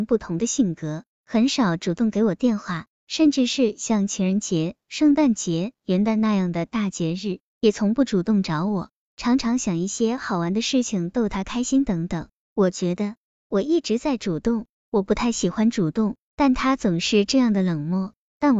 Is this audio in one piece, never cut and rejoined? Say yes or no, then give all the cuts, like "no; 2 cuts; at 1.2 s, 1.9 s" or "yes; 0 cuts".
no; 2 cuts; at 2.9 s, 9.0 s